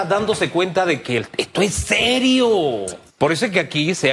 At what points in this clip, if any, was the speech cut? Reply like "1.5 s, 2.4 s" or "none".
3.1 s

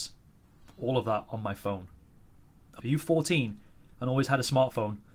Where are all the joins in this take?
2.8 s

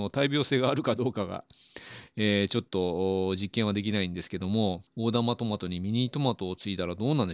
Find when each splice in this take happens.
none

